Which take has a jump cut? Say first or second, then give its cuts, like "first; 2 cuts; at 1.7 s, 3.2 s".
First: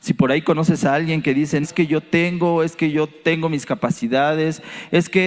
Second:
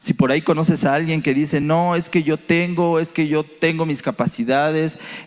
first; 1 cut; at 1.6 s